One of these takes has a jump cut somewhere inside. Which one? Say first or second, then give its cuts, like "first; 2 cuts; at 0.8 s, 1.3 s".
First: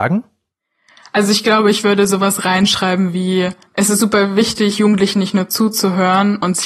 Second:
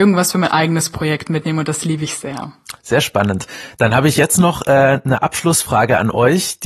first; 1 cut; at 3.7 s